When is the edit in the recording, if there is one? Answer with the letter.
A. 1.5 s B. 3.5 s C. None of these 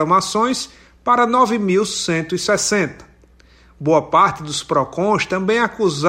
C